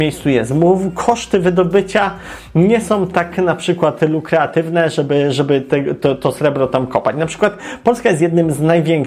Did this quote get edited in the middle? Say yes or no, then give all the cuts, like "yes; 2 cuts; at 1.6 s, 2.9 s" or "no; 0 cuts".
no; 0 cuts